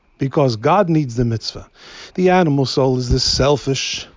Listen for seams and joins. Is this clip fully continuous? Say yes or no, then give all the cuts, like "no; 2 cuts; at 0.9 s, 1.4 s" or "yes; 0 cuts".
no; 1 cut; at 2.1 s